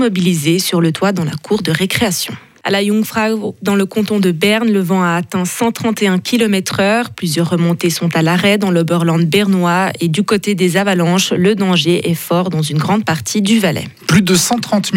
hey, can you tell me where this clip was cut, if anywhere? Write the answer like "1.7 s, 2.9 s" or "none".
2.6 s